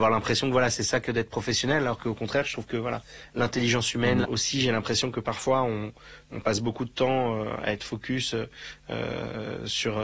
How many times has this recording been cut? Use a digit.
2